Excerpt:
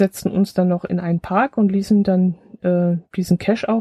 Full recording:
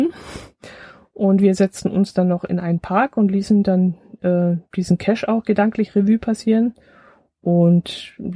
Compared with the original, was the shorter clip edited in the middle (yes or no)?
no